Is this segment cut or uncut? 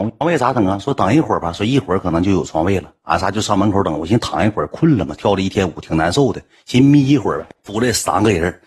uncut